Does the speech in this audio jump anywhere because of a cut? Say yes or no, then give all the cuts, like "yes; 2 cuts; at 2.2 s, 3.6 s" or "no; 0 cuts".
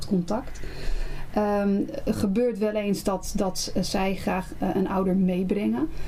no; 0 cuts